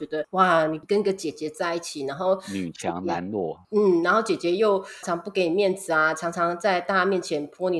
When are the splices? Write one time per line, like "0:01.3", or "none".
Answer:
0:05.0